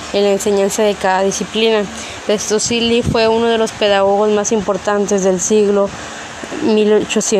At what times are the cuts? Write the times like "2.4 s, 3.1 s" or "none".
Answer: 2.2 s